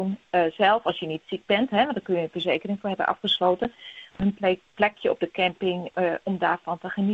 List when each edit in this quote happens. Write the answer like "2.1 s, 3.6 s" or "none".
4.1 s